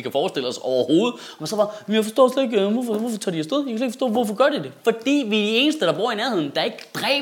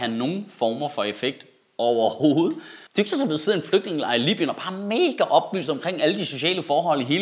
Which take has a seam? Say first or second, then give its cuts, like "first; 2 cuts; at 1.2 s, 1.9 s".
second; 1 cut; at 2.9 s